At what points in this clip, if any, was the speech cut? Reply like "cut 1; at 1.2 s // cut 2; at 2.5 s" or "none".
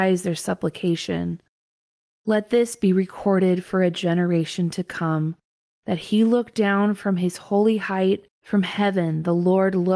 cut 1; at 5.6 s // cut 2; at 8.3 s